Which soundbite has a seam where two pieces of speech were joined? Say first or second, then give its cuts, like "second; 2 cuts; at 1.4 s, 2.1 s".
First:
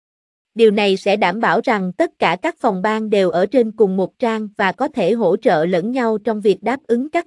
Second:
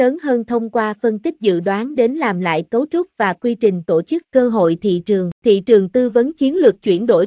second; 2 cuts; at 4.2 s, 5.4 s